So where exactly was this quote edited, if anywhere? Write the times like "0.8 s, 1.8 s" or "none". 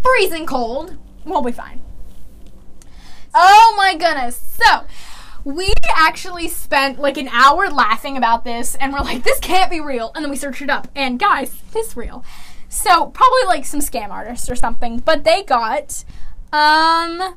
3.3 s